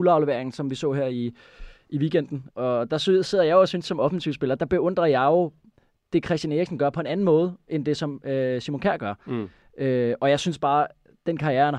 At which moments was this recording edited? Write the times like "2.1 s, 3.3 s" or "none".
2.5 s, 4.6 s